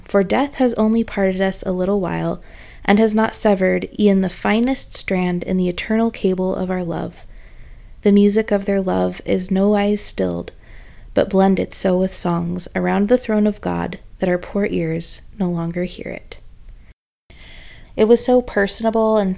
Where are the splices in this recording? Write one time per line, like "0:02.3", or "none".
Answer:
0:08.0
0:17.8